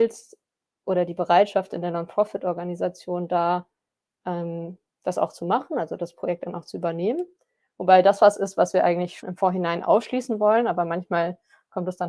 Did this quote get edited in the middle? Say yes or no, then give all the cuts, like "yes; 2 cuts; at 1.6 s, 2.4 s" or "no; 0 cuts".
yes; 1 cut; at 9.2 s